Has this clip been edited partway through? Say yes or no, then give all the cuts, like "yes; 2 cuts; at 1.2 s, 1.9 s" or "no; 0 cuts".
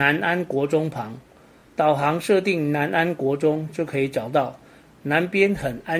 no; 0 cuts